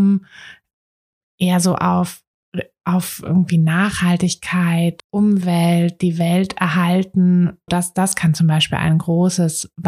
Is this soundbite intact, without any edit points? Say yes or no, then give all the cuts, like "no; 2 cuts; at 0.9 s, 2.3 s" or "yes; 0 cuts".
no; 2 cuts; at 5.0 s, 7.7 s